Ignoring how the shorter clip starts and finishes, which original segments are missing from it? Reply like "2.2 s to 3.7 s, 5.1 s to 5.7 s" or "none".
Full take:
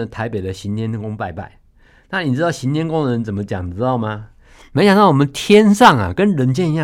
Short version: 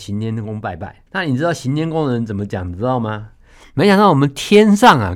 1.6 s to 2.0 s